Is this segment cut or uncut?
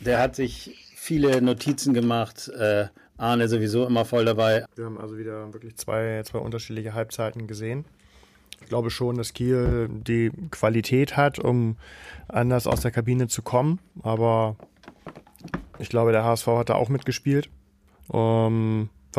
cut